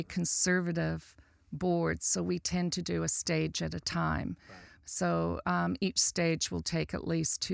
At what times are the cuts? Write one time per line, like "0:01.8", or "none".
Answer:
none